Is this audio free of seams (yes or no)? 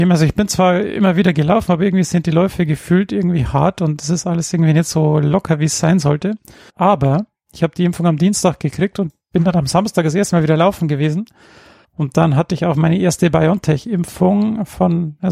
no